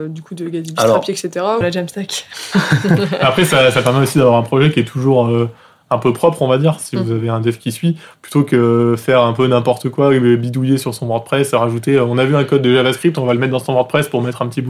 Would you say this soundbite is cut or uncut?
cut